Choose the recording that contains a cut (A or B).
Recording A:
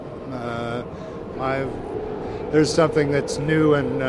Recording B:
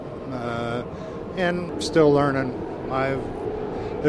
A